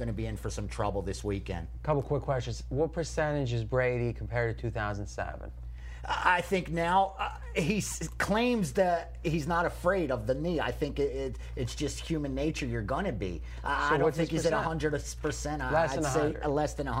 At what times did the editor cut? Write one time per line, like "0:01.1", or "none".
none